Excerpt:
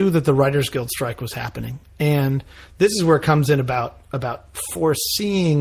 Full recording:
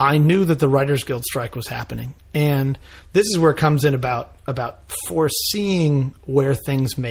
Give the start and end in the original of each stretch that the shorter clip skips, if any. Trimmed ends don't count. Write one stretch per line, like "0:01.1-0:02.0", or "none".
none